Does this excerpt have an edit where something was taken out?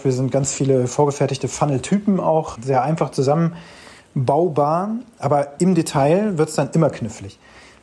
yes; 1 cut; at 2.6 s

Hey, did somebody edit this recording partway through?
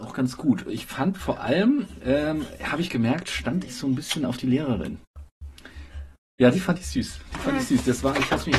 no; 0 cuts

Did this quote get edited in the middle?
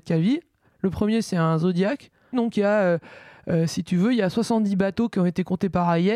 yes; 1 cut; at 2.3 s

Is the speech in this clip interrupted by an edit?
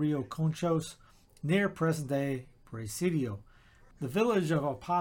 yes; 1 cut; at 3.9 s

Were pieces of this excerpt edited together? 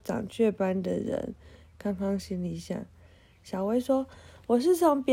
no; 0 cuts

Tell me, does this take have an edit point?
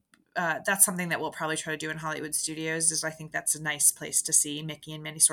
no; 0 cuts

